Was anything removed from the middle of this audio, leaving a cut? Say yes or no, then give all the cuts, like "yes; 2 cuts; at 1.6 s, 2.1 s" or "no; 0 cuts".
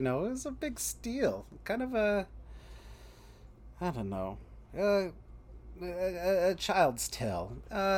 no; 0 cuts